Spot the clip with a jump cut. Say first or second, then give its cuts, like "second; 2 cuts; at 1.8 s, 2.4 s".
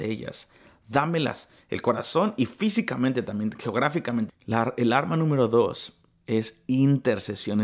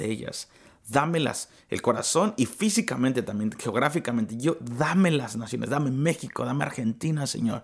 first; 1 cut; at 4.3 s